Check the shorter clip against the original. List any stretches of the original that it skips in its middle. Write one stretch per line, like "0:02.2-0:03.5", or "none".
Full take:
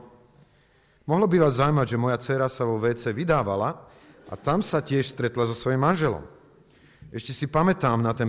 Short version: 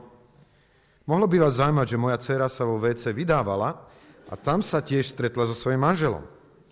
none